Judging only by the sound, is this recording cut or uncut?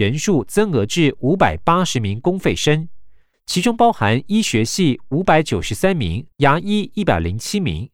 cut